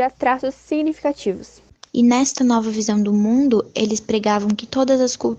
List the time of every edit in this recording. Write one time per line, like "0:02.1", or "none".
0:01.9